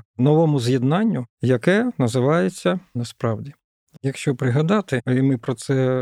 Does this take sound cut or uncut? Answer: cut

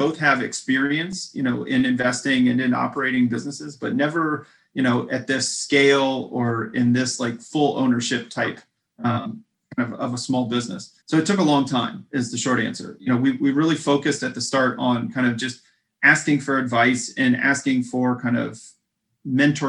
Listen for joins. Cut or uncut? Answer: cut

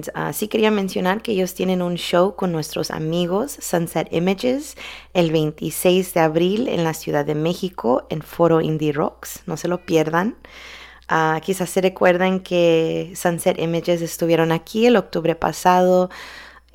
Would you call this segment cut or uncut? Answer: uncut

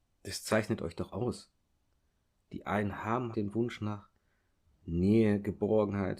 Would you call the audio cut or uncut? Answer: cut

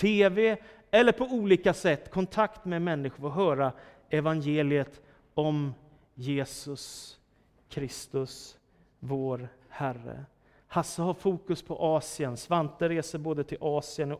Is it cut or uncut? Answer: uncut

